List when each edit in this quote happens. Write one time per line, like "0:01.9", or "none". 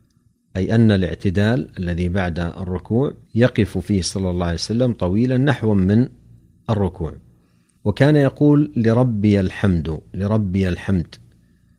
0:03.2